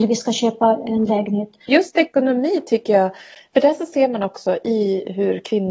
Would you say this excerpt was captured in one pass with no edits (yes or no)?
no